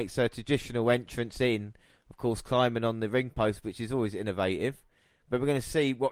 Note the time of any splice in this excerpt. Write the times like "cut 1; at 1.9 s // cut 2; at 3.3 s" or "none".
none